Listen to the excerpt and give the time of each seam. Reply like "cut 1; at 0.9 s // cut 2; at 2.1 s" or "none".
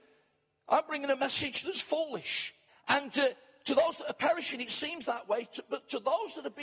cut 1; at 2.7 s